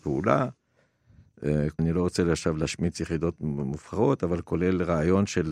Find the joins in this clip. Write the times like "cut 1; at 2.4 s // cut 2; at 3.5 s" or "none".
cut 1; at 1.8 s